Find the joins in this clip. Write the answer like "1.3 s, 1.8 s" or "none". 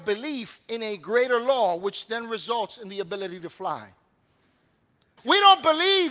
5.2 s